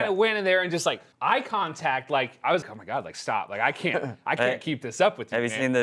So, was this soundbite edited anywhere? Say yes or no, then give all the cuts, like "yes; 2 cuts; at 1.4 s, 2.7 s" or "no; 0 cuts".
yes; 2 cuts; at 1.1 s, 2.6 s